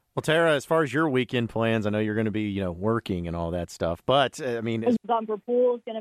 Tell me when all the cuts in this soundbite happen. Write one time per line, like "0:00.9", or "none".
0:05.0